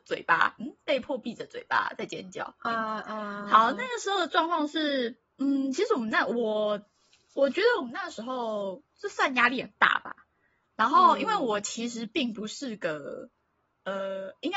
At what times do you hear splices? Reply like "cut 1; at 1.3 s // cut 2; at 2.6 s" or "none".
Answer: none